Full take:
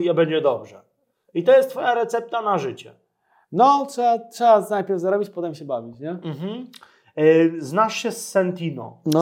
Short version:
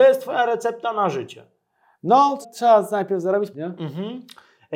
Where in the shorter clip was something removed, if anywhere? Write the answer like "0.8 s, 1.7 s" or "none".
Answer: 2.4 s, 3.5 s

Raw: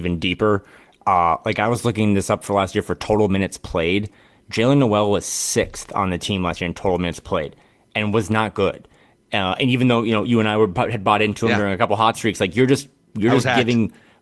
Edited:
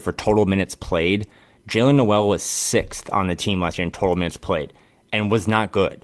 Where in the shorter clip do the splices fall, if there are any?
none

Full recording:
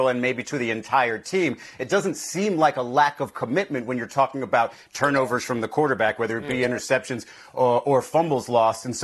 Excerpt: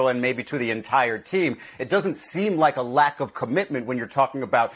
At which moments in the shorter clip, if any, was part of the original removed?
none

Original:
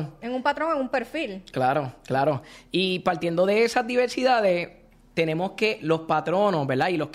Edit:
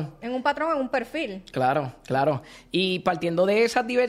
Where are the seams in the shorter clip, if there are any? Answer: none

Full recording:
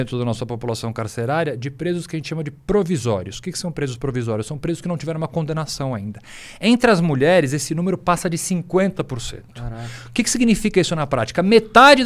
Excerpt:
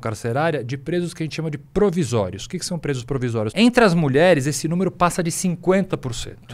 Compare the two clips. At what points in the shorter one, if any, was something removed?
3.5 s

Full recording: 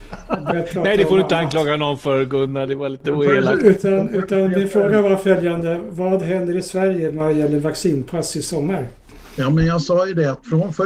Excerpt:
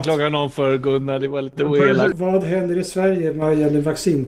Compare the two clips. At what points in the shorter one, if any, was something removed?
2.1 s

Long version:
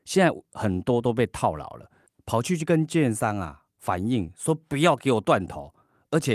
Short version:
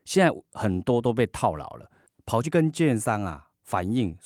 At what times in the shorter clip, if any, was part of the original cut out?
2.4 s

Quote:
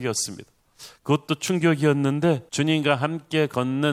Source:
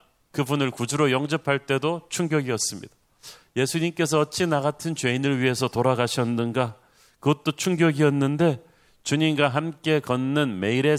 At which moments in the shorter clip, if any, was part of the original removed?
1.0 s, 2.5 s

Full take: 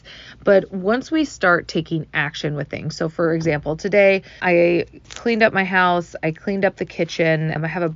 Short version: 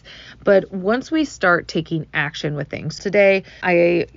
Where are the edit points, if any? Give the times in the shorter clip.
3.0 s

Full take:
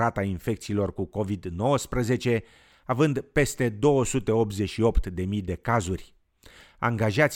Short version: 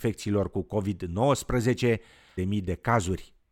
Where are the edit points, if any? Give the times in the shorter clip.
2.4 s

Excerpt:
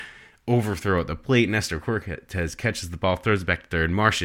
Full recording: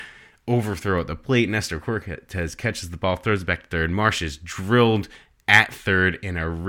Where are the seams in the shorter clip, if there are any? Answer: none

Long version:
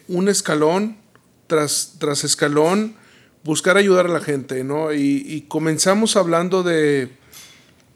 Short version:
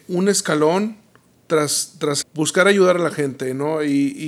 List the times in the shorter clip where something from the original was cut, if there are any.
2.2 s

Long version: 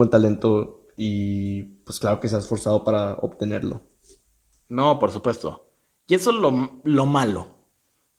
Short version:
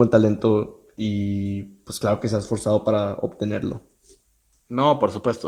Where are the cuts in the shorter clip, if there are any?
none

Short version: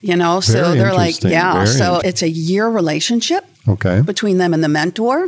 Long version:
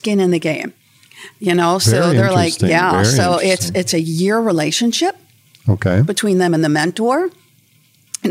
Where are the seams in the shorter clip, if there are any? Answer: 2.0 s, 3.5 s

